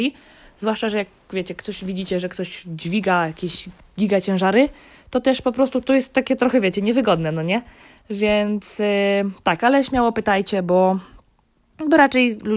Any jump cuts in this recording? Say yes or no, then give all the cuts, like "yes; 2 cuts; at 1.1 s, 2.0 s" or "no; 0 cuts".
no; 0 cuts